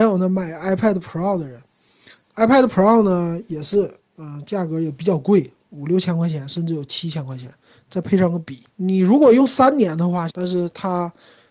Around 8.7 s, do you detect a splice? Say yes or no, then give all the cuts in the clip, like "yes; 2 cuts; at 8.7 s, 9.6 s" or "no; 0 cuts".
yes; 2 cuts; at 8.7 s, 10.3 s